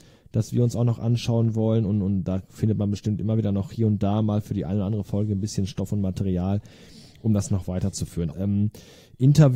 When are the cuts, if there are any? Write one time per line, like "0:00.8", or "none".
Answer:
0:08.3